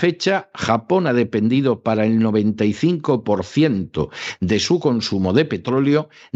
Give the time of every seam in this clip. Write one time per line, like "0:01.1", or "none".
none